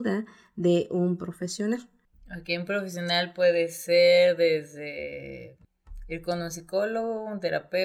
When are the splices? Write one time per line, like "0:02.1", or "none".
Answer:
none